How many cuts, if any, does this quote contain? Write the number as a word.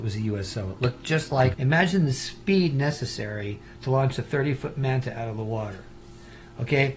one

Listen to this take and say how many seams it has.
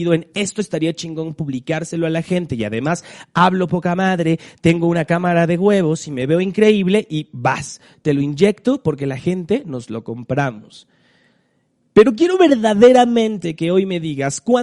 zero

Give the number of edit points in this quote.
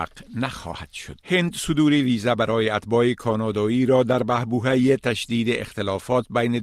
one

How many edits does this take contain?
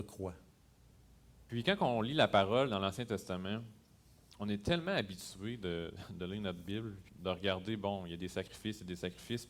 two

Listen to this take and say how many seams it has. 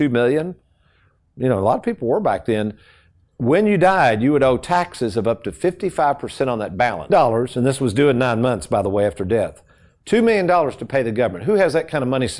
one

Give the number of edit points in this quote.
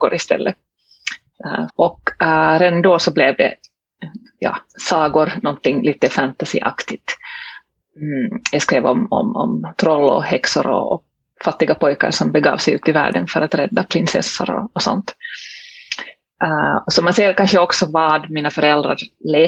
one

